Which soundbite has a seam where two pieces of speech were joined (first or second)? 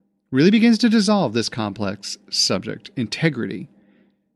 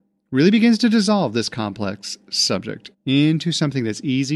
second